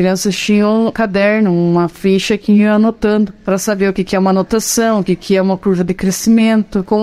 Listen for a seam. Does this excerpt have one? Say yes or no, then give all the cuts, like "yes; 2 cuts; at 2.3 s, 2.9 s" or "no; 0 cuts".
yes; 1 cut; at 0.9 s